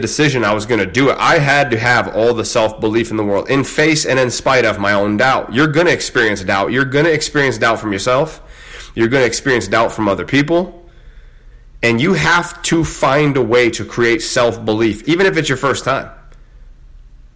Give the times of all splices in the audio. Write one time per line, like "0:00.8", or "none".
0:15.0